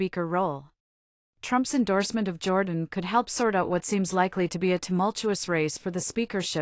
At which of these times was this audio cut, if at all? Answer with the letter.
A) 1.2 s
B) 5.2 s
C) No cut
A